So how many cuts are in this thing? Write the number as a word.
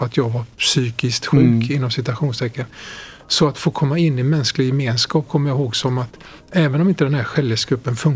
zero